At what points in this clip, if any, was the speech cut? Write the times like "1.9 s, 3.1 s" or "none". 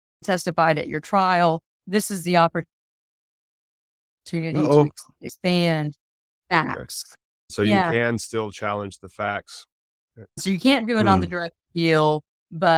10.3 s

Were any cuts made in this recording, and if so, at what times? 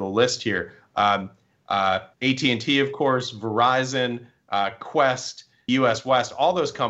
2.1 s, 5.7 s

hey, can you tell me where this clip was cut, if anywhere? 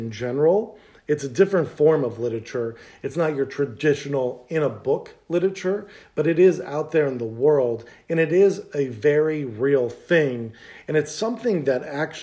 none

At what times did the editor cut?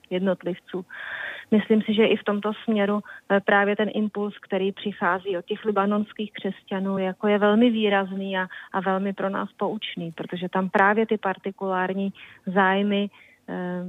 none

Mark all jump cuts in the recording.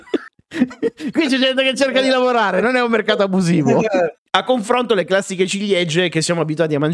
4.2 s

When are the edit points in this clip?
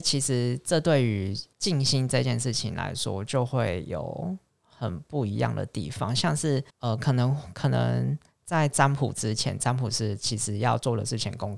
1.5 s, 6.7 s

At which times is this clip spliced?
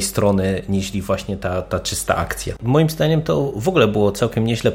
2.6 s

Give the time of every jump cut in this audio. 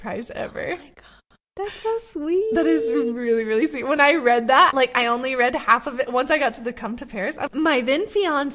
4.7 s, 7.5 s

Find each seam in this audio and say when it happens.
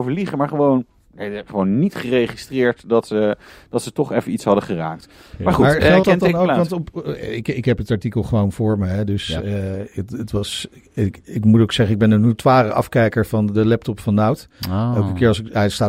none

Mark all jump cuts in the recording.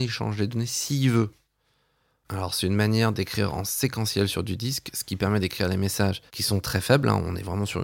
2.2 s, 6.3 s

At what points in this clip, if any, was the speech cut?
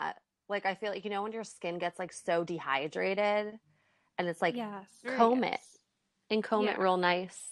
5.0 s

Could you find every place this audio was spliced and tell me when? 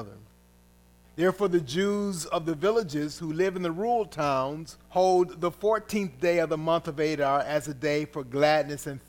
1.0 s, 4.8 s

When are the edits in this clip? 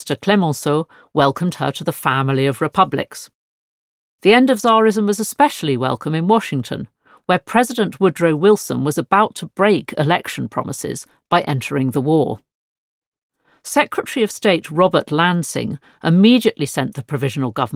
none

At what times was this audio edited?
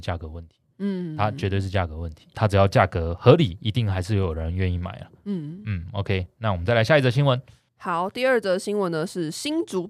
none

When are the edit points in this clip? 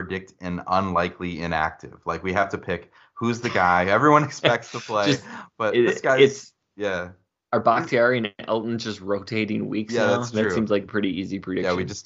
none

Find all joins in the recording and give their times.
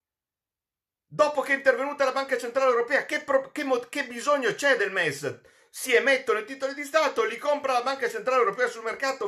none

